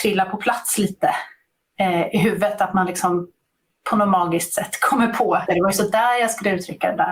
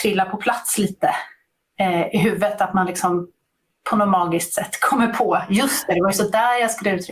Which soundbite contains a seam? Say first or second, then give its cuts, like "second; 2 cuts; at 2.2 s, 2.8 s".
first; 1 cut; at 5.5 s